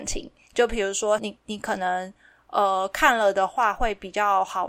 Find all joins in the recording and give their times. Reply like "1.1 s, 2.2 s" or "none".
1.2 s

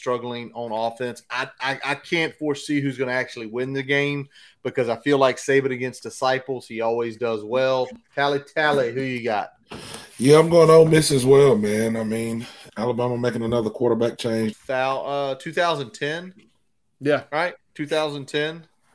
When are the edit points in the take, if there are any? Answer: 8.1 s, 12.7 s, 14.5 s

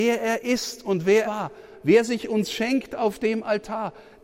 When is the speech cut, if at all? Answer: 1.2 s

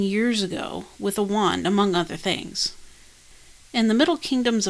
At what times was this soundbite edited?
none

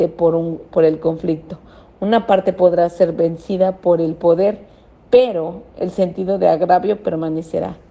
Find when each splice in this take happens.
none

